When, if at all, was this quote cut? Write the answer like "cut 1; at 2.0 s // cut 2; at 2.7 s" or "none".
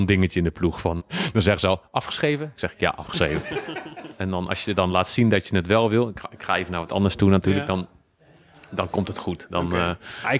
cut 1; at 1.0 s // cut 2; at 4.1 s